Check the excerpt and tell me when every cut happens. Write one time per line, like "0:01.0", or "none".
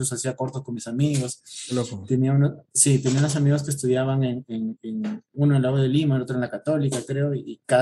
none